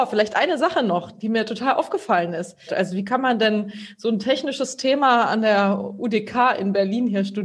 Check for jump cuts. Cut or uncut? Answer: cut